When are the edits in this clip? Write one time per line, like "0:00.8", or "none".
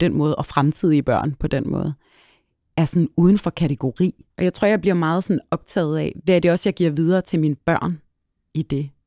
0:04.3